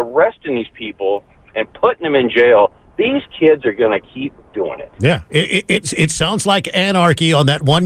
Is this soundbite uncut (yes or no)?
yes